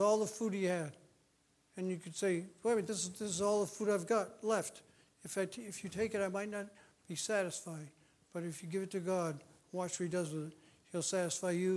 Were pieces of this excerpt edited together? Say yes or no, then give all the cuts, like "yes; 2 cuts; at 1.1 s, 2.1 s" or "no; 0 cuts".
no; 0 cuts